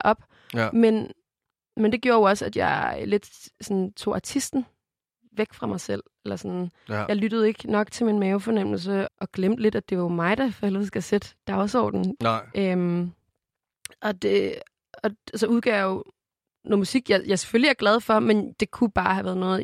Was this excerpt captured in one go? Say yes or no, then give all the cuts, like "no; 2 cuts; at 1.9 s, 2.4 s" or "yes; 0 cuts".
no; 2 cuts; at 9.1 s, 12.2 s